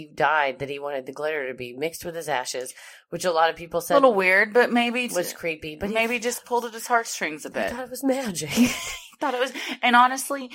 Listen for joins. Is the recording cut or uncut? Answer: cut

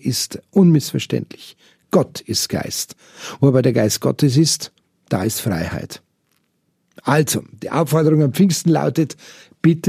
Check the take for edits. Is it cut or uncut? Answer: uncut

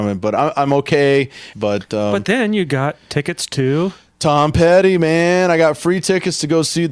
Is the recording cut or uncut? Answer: cut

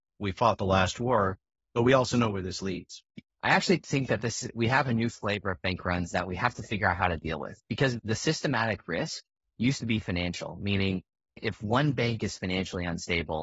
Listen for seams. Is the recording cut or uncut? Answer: cut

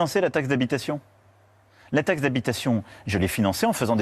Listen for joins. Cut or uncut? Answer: uncut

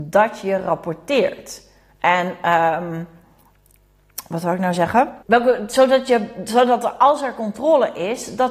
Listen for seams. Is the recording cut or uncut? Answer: cut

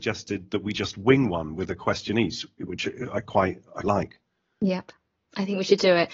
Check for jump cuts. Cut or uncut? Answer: cut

